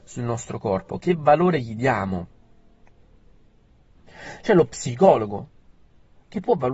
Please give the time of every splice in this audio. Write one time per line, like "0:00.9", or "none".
0:03.9